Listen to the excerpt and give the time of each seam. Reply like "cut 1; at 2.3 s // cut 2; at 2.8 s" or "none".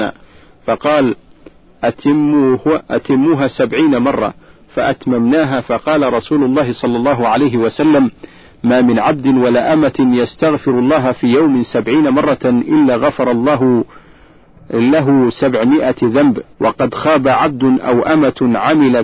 cut 1; at 16.5 s